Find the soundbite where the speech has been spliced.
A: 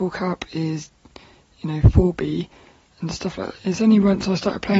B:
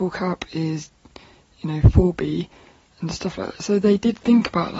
A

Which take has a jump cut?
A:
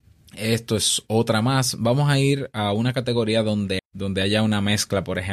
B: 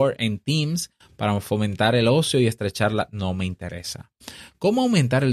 A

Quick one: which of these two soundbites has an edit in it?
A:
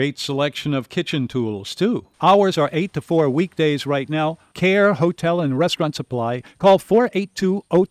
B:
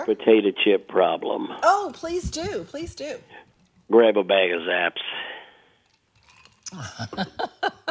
A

